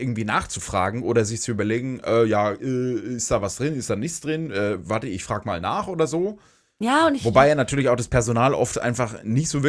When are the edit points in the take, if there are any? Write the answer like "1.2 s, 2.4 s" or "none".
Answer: none